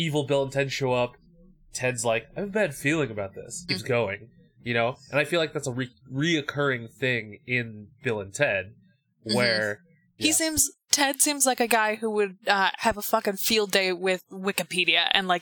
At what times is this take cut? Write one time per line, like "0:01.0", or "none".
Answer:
0:03.7
0:10.2